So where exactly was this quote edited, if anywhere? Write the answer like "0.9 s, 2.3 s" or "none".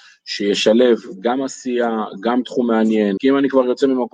3.2 s